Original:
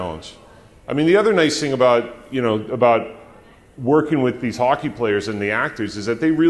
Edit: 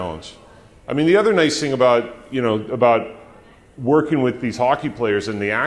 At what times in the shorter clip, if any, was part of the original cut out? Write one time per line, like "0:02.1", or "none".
none